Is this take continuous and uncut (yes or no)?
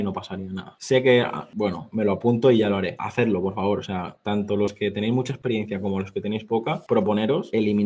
yes